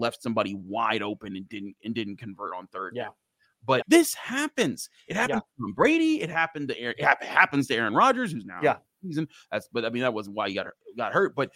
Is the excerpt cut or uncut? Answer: cut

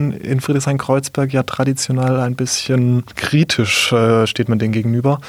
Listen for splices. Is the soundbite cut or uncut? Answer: uncut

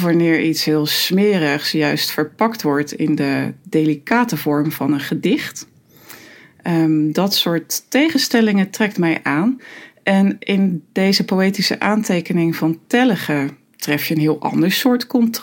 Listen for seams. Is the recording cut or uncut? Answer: uncut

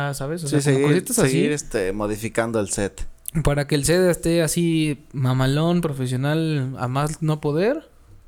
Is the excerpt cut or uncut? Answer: uncut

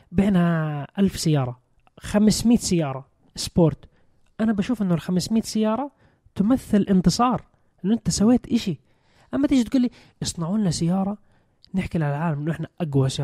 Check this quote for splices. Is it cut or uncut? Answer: uncut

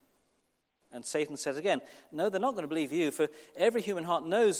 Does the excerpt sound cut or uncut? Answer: uncut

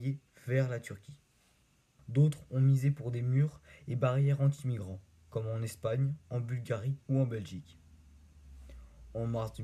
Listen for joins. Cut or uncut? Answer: cut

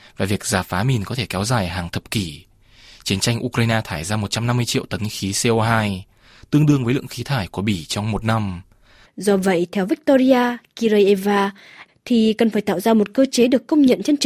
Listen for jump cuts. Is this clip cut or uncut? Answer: cut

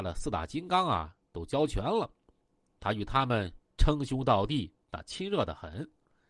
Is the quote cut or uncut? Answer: uncut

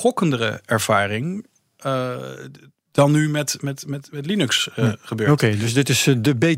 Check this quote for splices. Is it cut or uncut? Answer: uncut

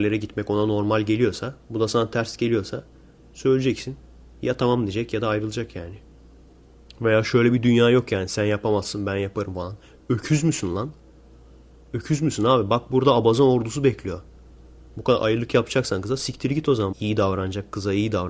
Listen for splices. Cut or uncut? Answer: cut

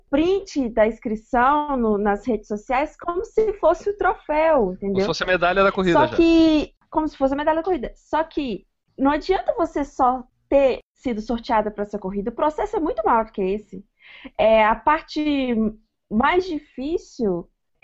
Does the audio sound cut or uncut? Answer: uncut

